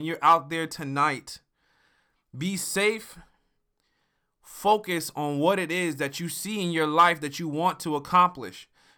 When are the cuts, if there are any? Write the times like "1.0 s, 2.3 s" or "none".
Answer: none